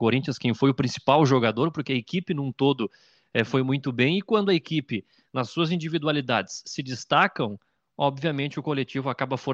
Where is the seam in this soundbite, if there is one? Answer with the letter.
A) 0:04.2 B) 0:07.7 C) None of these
C